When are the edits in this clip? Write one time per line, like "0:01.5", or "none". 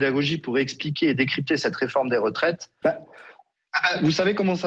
0:02.8